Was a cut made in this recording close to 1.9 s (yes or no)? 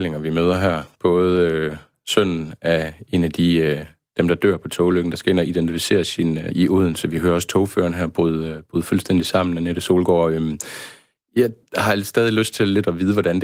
yes